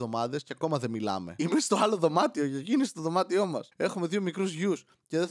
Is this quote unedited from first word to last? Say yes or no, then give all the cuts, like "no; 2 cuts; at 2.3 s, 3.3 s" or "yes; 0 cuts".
no; 1 cut; at 3.7 s